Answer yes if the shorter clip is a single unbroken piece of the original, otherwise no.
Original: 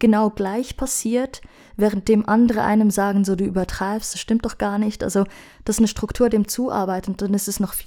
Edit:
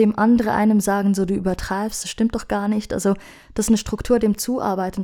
yes